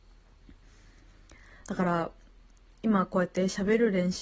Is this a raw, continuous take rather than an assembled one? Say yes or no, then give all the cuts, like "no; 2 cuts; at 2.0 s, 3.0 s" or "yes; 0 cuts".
no; 1 cut; at 1.6 s